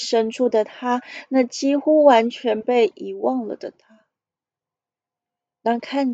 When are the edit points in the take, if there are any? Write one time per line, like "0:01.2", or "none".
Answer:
none